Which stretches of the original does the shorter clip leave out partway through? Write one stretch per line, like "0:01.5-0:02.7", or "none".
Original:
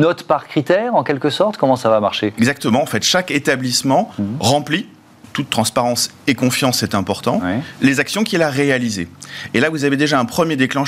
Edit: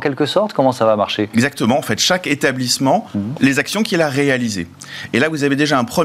0:04.4-0:07.8

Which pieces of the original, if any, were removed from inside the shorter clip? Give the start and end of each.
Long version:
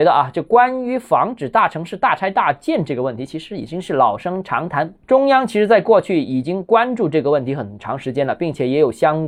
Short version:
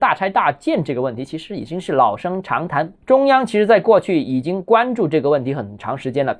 none

